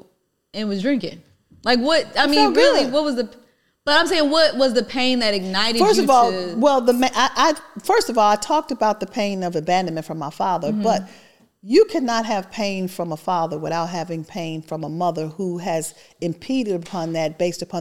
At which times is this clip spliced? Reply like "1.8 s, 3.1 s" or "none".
none